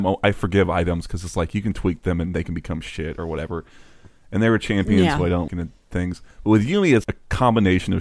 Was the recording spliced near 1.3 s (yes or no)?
no